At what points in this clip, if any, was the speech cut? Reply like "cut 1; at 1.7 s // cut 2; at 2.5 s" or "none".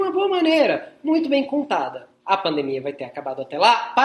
cut 1; at 2.2 s